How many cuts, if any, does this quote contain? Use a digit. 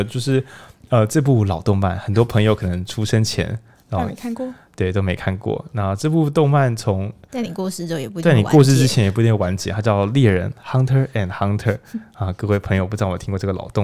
0